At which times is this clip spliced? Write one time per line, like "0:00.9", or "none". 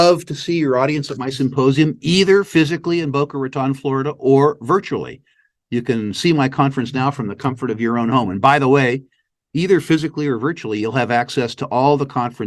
none